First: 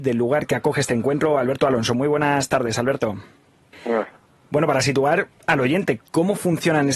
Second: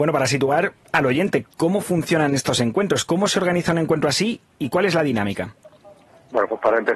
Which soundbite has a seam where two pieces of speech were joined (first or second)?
first